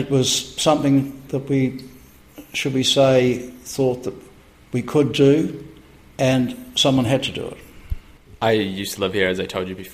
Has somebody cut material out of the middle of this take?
yes; 1 cut; at 1.3 s

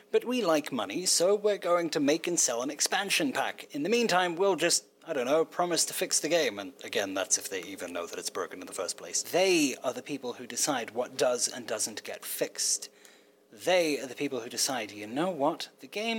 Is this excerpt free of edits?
no; 1 cut; at 9.2 s

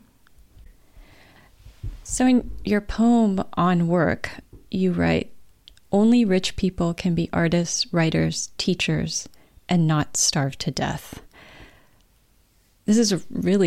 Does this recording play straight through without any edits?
yes; 0 cuts

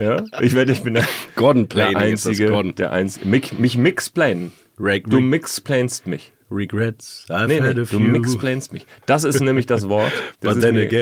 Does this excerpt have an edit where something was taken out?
no; 0 cuts

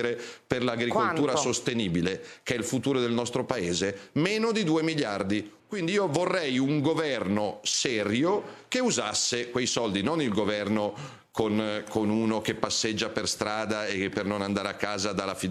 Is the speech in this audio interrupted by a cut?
yes; 1 cut; at 5.6 s

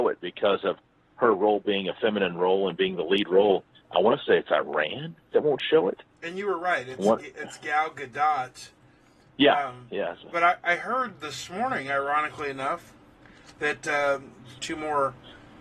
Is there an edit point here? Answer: yes; 1 cut; at 14.6 s

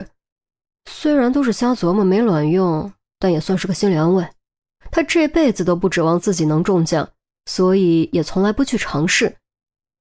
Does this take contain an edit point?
yes; 1 cut; at 4.8 s

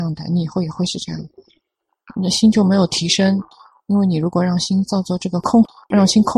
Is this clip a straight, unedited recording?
yes; 0 cuts

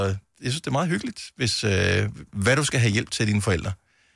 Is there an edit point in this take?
yes; 1 cut; at 2.3 s

